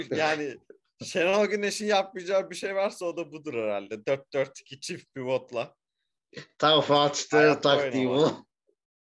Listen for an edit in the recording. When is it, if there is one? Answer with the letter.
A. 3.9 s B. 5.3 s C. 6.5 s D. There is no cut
D